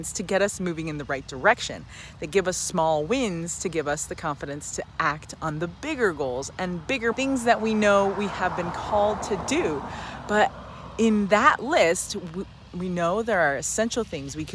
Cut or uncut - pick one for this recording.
cut